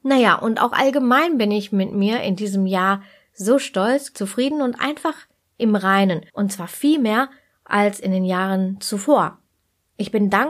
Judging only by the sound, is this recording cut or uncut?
cut